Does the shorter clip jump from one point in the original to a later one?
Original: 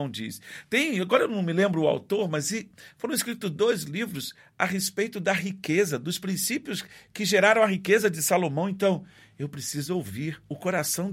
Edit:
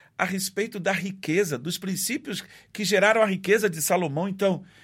no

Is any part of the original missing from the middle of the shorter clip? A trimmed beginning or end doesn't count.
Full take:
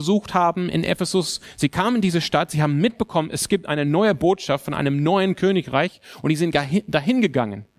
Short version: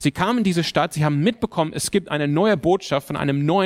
no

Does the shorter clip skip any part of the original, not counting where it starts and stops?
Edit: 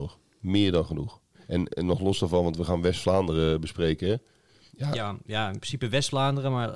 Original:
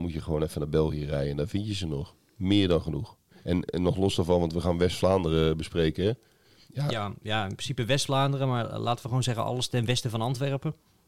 no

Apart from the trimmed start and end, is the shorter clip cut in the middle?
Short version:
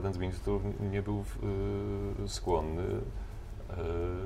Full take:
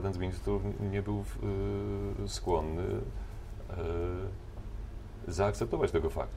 no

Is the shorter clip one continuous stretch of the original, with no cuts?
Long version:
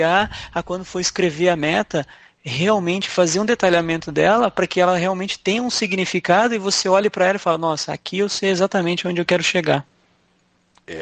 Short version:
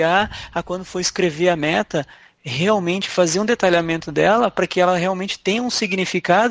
yes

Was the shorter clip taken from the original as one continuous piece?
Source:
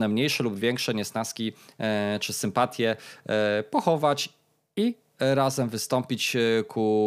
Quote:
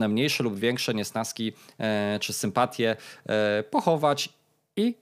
yes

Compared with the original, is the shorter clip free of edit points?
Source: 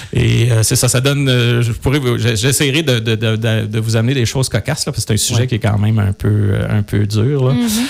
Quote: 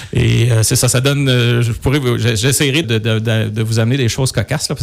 no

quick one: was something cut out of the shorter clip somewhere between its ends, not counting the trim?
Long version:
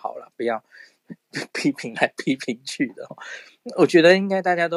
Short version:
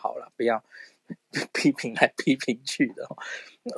no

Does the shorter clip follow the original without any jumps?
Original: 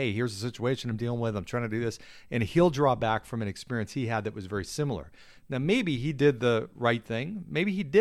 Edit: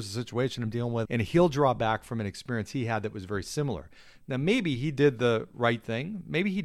no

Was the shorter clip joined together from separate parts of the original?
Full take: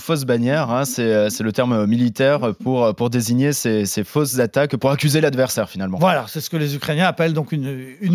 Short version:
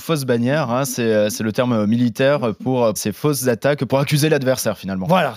yes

